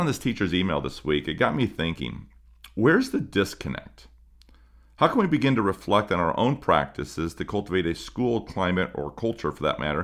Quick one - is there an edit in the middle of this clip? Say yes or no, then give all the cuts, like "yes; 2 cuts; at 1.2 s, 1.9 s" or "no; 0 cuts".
no; 0 cuts